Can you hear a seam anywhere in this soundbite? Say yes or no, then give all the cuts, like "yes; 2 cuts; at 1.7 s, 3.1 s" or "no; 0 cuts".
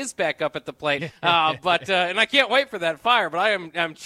yes; 1 cut; at 1.0 s